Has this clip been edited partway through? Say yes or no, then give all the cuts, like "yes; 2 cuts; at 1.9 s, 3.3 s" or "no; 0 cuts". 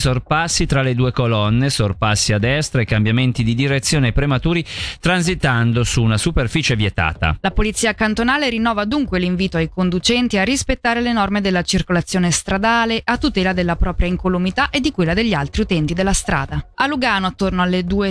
yes; 1 cut; at 16.7 s